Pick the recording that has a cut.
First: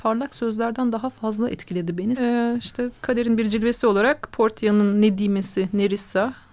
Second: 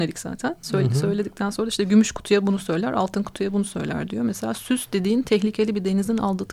first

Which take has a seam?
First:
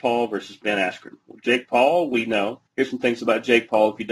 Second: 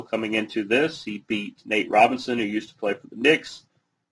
first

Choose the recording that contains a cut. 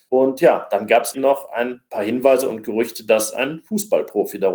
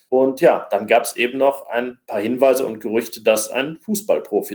first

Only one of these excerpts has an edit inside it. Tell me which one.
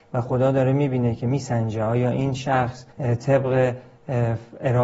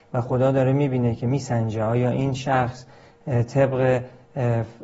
first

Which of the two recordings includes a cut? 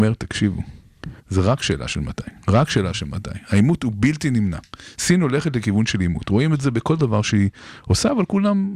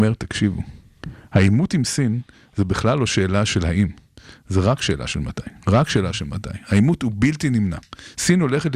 first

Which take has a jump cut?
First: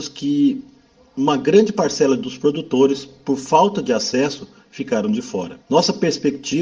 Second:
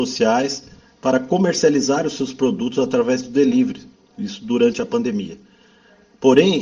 first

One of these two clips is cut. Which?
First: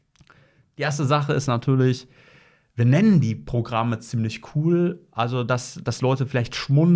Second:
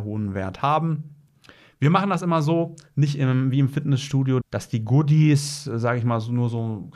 second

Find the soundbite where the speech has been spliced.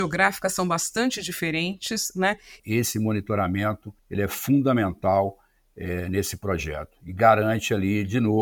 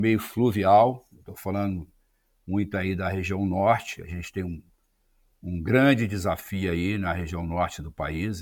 first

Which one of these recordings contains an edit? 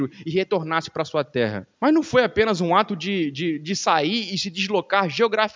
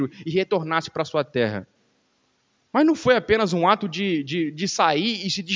first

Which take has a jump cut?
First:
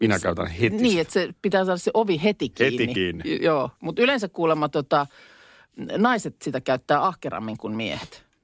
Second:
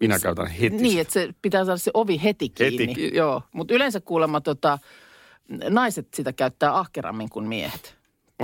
second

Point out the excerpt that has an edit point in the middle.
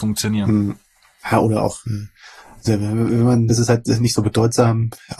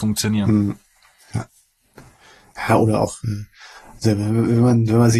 first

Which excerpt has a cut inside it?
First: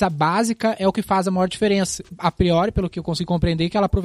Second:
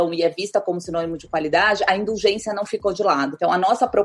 first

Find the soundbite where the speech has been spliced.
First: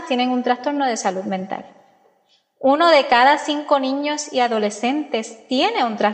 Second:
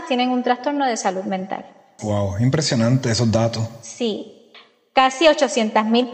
second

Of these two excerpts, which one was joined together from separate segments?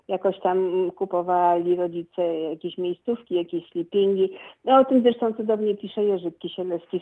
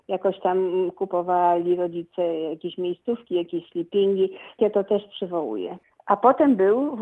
second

